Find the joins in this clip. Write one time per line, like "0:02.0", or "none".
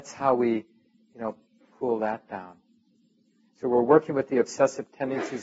0:01.7